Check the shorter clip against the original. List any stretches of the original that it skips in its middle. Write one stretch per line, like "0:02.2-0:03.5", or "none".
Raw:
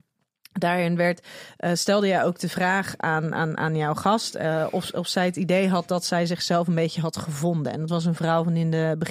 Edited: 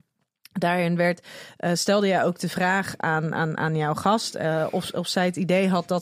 none

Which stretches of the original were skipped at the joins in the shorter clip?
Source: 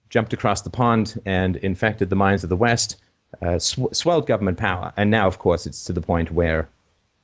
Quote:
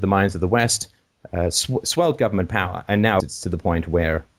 0:05.3-0:05.6

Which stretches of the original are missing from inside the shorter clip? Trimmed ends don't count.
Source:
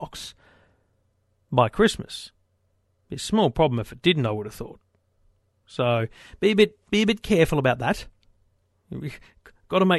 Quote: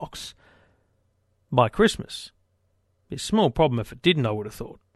none

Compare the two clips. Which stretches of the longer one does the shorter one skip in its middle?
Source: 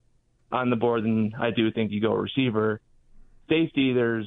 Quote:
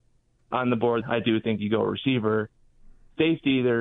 0:01.0-0:01.3

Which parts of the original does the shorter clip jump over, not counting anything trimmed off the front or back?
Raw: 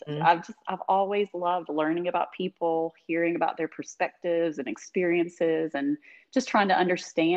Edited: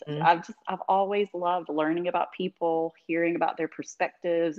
none

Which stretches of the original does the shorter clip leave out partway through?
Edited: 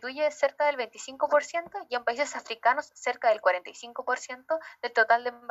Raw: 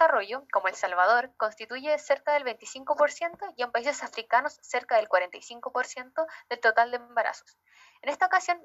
none

